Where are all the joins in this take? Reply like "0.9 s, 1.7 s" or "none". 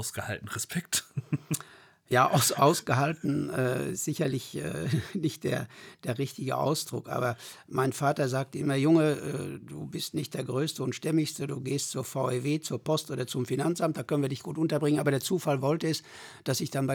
none